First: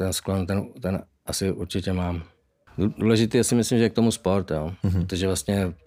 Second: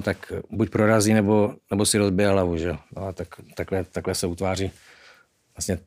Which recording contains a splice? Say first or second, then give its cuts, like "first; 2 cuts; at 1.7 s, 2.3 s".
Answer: first; 1 cut; at 2.7 s